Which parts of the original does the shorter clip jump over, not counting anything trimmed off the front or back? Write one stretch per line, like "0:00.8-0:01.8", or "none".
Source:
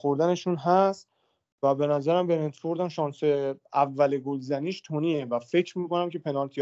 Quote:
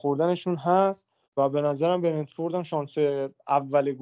0:01.2-0:01.5